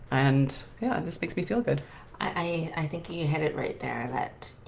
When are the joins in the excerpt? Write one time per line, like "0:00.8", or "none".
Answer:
none